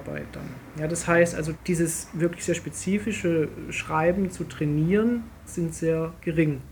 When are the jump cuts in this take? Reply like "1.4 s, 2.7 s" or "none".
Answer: 1.5 s, 5.5 s